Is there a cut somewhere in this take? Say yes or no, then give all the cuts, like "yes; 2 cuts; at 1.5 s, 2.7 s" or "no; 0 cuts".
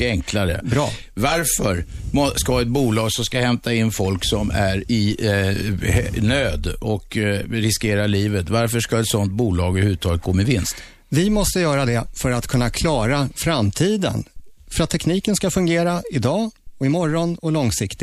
no; 0 cuts